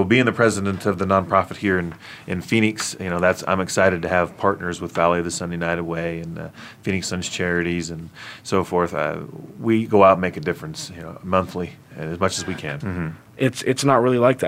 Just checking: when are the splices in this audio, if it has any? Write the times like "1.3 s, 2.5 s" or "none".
12.8 s